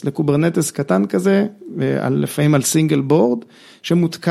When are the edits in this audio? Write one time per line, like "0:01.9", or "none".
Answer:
none